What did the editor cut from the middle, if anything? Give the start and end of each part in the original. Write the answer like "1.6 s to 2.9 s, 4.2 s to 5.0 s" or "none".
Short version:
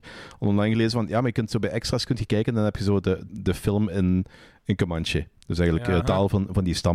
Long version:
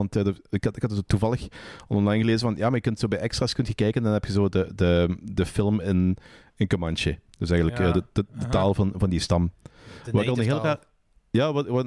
4.8 s to 5.2 s, 7.9 s to 8.5 s